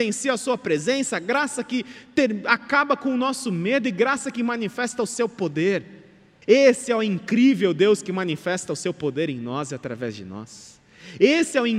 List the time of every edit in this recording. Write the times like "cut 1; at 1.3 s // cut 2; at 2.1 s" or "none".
cut 1; at 6.4 s